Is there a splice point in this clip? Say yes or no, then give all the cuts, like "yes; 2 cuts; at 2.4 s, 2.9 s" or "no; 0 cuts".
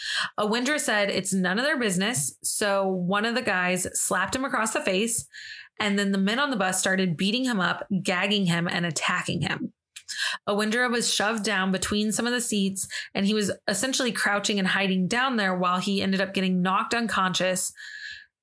no; 0 cuts